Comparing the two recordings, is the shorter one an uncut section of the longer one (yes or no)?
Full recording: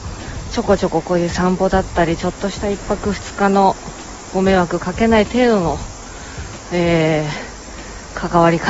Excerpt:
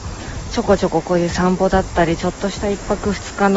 yes